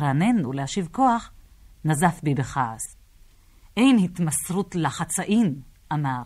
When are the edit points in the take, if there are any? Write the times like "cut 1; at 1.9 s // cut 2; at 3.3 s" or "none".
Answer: none